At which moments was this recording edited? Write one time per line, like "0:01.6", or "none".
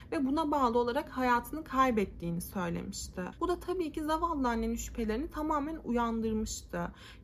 0:03.3